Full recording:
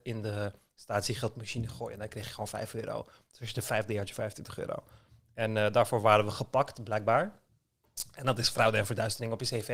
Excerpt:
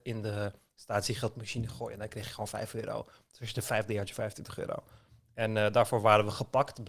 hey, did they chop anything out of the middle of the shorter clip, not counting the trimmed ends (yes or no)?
no